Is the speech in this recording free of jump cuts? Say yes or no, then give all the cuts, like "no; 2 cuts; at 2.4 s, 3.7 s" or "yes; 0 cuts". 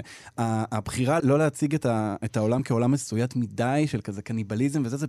no; 1 cut; at 1.2 s